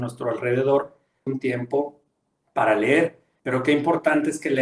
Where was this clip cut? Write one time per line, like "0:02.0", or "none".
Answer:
0:01.3
0:03.4